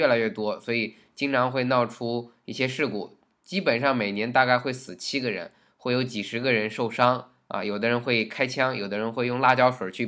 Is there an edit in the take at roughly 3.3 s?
no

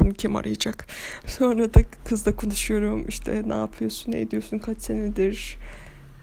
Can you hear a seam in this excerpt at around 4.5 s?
no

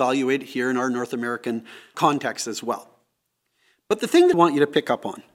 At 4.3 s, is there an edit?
yes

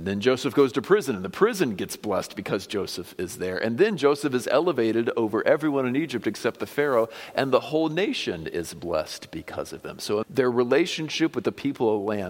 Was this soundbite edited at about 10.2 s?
yes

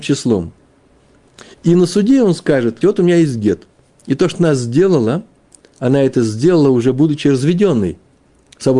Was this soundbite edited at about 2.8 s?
yes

